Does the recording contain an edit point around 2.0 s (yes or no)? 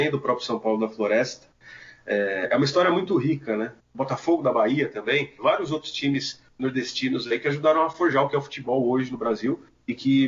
no